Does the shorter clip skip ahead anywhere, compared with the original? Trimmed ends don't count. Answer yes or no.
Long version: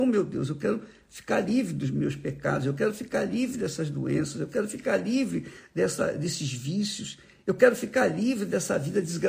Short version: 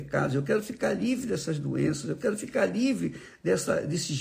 no